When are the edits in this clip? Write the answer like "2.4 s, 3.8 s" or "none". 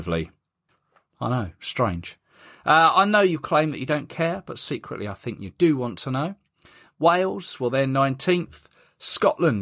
none